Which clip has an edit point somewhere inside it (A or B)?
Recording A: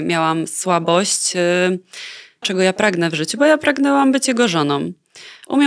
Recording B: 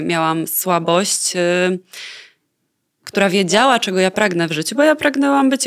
A